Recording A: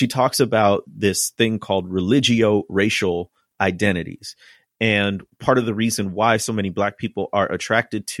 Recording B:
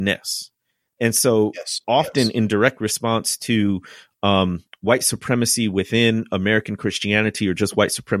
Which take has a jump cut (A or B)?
B